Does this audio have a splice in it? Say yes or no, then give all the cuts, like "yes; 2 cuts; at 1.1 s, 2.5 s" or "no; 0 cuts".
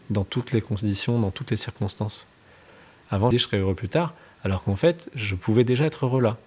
yes; 1 cut; at 3.3 s